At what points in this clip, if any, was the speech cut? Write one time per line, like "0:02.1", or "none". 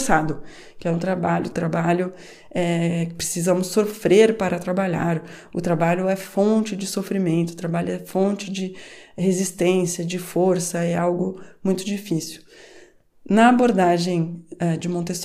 0:01.5